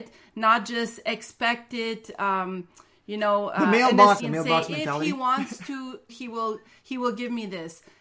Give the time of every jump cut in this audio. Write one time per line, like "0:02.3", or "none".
0:04.2
0:06.1